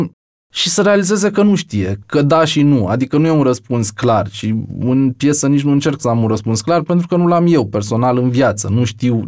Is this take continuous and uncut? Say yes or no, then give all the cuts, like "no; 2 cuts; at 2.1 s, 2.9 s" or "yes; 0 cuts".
no; 1 cut; at 2.0 s